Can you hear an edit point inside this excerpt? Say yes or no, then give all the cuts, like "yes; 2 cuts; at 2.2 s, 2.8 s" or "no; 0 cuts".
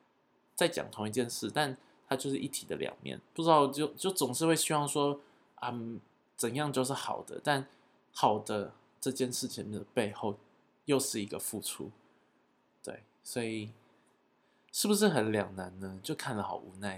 no; 0 cuts